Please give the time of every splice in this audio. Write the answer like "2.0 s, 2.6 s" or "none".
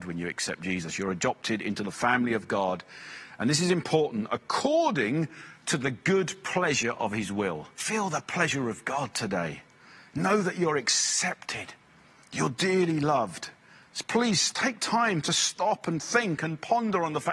7.8 s